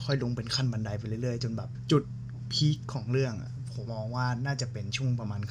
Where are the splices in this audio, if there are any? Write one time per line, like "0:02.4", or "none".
0:03.9